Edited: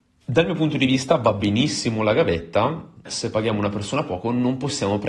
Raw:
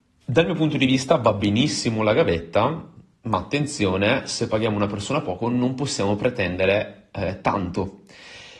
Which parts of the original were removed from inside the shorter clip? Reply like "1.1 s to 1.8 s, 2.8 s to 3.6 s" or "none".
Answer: 3.1 s to 4.2 s